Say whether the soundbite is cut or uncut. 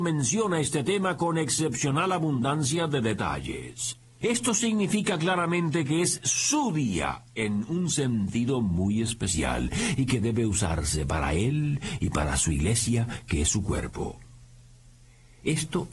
cut